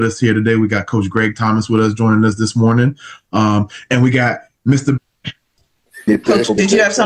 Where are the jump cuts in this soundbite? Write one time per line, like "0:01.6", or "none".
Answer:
0:05.0